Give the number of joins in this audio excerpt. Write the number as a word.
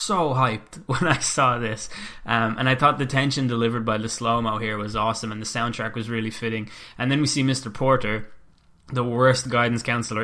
zero